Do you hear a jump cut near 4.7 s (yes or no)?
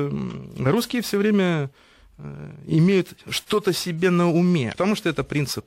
yes